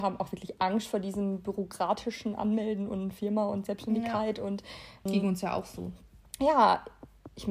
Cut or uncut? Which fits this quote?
cut